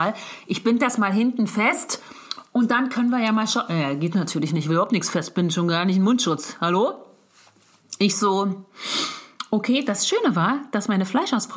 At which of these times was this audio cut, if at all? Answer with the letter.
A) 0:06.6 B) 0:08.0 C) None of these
C